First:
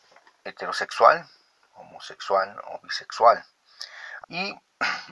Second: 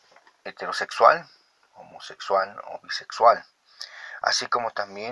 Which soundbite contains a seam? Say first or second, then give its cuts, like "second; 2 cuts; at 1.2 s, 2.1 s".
first; 1 cut; at 4.2 s